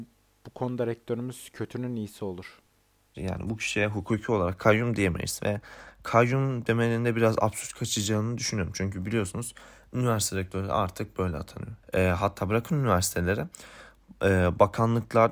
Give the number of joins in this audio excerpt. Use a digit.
1